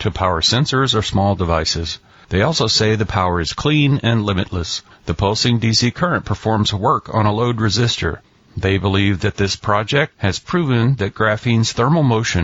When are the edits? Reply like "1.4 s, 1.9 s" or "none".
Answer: 4.9 s, 8.4 s